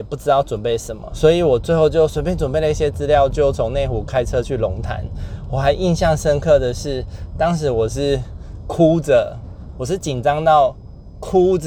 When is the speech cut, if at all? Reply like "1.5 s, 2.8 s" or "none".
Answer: 1.1 s